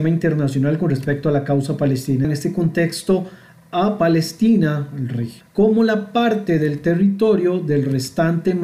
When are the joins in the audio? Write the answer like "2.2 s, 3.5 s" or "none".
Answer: 2.2 s, 5.4 s